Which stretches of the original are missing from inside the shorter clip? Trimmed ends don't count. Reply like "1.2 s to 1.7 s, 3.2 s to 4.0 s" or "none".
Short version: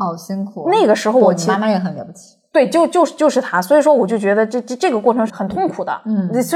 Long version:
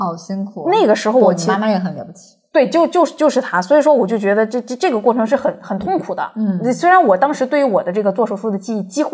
5.3 s to 5.6 s